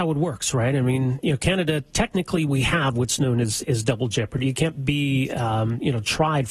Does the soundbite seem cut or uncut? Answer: uncut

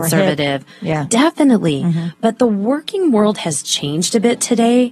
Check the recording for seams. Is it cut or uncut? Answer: uncut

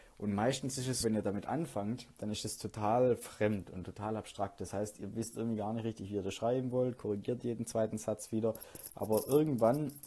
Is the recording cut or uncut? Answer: cut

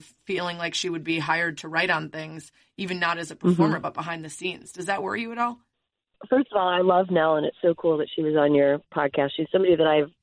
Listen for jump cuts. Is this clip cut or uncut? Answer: uncut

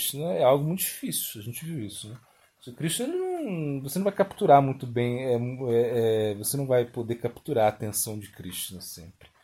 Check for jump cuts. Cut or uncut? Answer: uncut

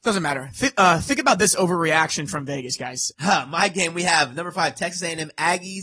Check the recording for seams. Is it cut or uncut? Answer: cut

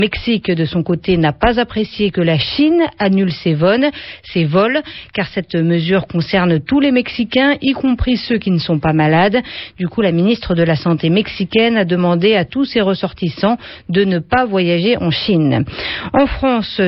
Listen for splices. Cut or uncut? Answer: uncut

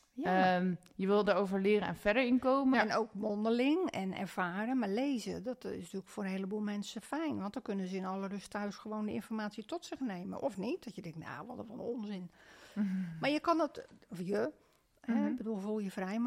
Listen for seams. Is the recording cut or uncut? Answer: cut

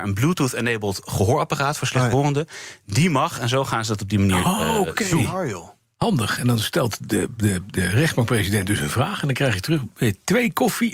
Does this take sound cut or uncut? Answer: uncut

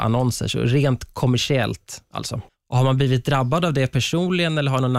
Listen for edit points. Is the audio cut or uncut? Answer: cut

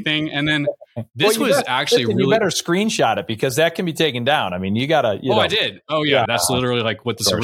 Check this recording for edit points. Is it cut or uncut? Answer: cut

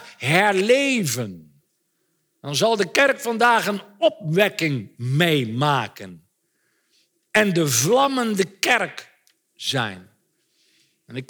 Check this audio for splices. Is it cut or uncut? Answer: uncut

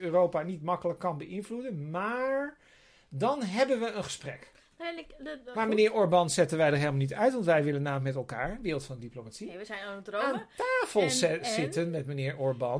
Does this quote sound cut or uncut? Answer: cut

